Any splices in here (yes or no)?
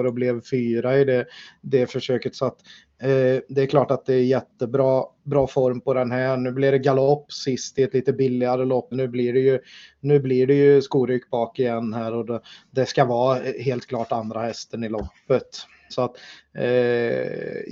yes